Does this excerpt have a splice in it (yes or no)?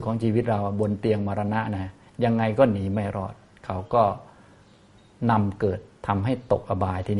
no